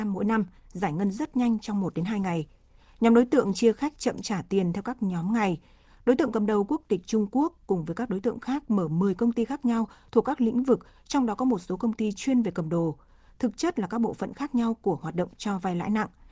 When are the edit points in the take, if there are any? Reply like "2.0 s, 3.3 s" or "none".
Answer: 5.9 s